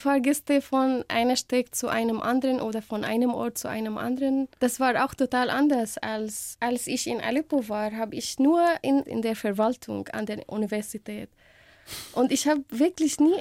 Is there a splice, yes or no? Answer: yes